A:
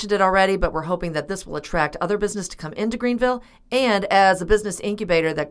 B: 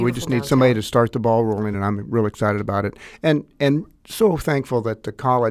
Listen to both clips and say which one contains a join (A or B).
B